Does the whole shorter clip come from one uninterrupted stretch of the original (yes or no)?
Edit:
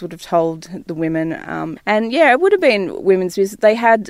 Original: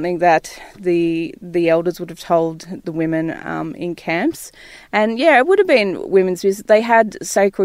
no